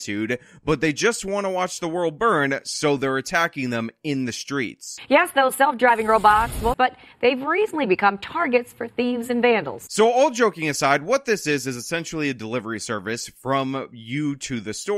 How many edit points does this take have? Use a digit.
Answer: 1